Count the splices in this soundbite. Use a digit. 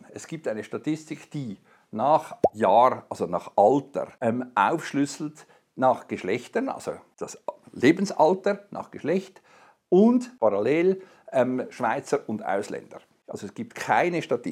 0